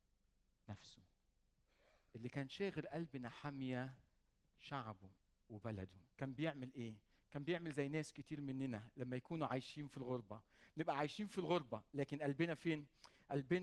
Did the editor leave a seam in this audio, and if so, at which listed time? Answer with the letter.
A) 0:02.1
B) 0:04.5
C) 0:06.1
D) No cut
C